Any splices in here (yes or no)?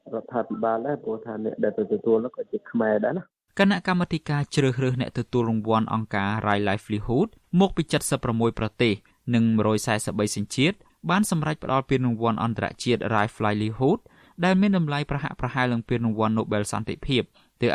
no